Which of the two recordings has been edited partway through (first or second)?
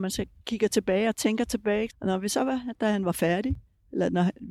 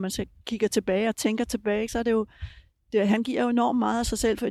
first